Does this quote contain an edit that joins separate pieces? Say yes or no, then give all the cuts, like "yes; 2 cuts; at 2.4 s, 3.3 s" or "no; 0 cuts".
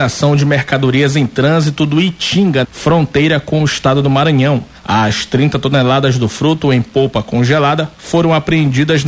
yes; 1 cut; at 2.6 s